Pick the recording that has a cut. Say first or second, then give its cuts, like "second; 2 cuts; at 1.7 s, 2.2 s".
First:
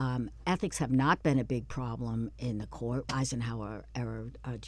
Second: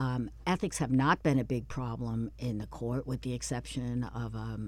first; 1 cut; at 3.0 s